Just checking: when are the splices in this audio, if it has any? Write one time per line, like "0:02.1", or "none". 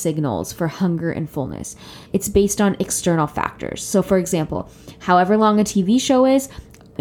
0:02.1